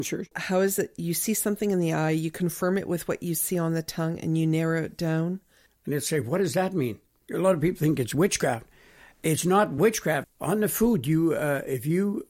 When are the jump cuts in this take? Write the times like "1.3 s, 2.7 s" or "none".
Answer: 5.7 s, 10.2 s

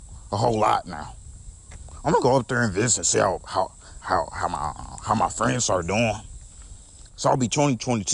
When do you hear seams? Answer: 4.0 s, 7.1 s

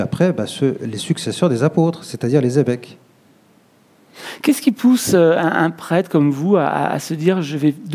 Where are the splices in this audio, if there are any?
none

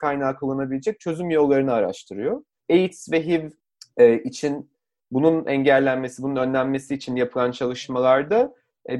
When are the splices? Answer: 2.6 s

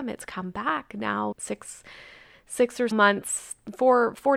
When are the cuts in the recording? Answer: 1.3 s, 2.9 s

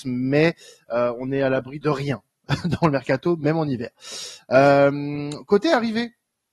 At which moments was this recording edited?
1.8 s

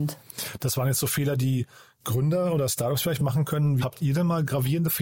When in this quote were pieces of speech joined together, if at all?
3.8 s

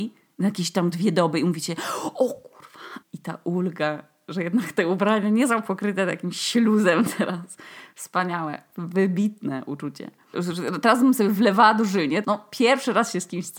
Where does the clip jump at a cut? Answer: 3.0 s, 10.3 s, 12.2 s

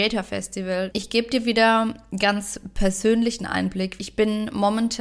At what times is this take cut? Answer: 0.9 s, 4.0 s

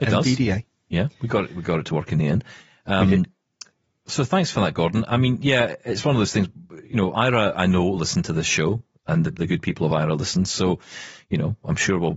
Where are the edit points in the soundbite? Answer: none

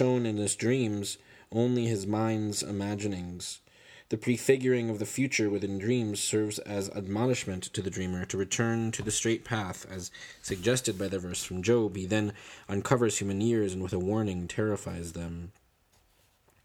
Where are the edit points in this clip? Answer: none

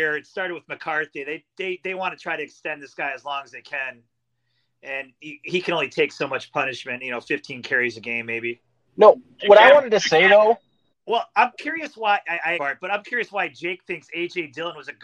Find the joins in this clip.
8.9 s, 10.9 s, 12.6 s

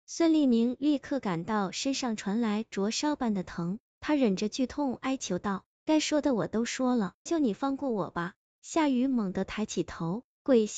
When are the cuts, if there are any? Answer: 7.3 s

